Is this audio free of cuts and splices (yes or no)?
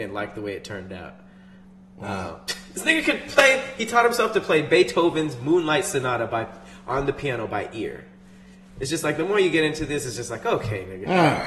yes